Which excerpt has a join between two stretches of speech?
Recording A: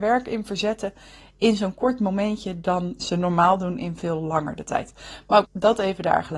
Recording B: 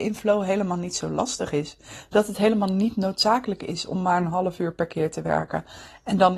A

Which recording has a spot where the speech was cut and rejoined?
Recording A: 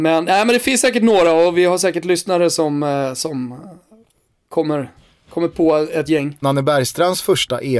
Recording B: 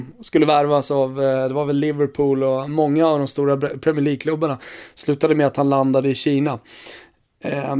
A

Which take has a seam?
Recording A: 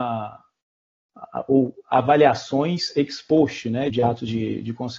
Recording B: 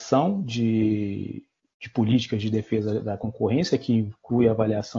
A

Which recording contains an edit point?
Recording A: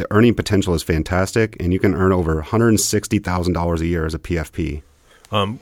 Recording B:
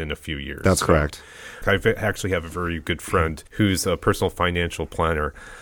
B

